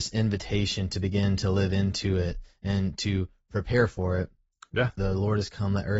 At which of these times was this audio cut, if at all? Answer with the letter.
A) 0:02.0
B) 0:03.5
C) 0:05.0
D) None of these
C